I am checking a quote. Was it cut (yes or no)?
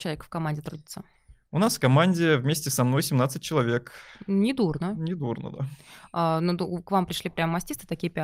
no